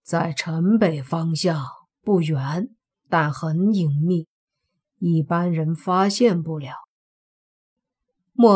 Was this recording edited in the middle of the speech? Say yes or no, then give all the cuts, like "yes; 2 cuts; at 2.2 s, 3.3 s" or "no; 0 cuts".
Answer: no; 0 cuts